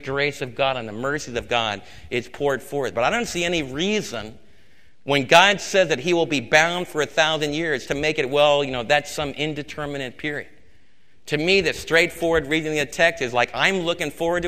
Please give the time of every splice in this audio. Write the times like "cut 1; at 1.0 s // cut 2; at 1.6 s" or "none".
none